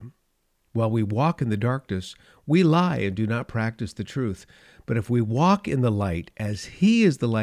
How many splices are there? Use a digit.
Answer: 0